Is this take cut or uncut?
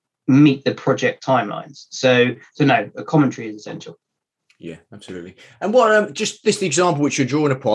uncut